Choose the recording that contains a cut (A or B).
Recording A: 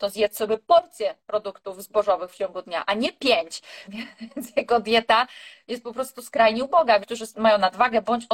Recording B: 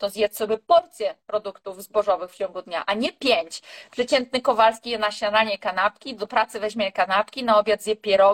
A